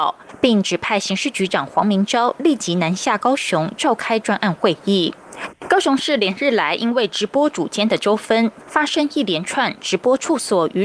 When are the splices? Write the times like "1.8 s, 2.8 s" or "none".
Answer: 5.5 s